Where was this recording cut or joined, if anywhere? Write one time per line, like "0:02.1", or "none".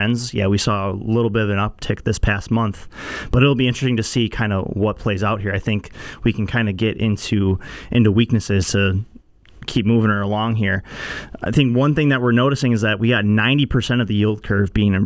none